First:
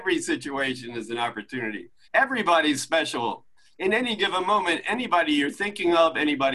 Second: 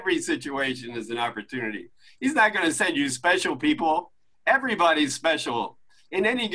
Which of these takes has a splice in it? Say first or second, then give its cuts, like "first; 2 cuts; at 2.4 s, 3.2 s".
first; 1 cut; at 2.0 s